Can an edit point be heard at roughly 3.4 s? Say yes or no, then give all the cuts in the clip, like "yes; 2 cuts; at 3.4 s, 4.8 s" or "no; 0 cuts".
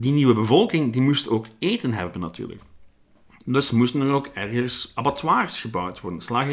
no; 0 cuts